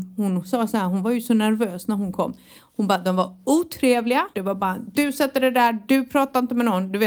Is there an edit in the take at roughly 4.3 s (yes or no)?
yes